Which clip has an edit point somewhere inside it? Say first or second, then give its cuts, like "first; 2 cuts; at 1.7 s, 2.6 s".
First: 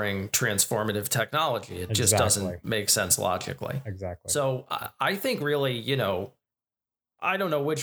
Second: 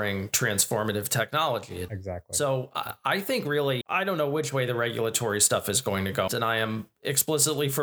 second; 3 cuts; at 1.9 s, 3.8 s, 6.3 s